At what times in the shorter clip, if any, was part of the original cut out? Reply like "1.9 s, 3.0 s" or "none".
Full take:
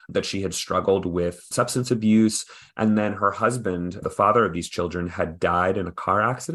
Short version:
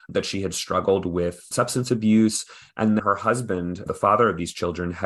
3.0 s